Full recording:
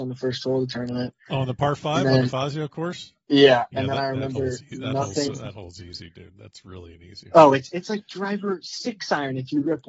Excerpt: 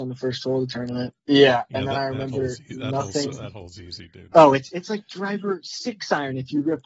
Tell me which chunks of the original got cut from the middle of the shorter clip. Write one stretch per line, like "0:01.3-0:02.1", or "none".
0:01.2-0:03.2
0:06.3-0:07.3

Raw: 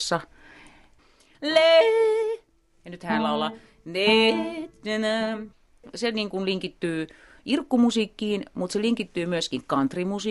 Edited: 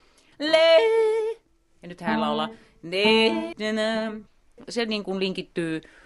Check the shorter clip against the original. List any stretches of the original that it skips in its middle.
0:04.6-0:04.8

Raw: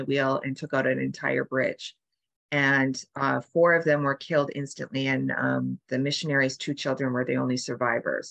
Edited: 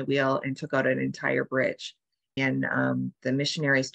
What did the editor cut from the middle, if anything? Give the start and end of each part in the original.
0:02.4-0:05.0

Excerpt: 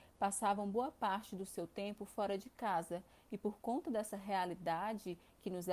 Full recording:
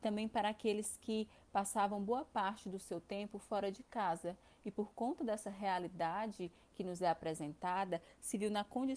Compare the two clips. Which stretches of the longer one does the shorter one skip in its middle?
none

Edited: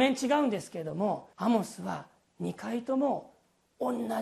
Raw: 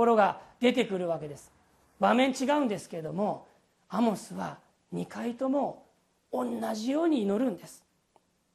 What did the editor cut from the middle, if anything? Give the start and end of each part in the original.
0:03.5-0:03.9

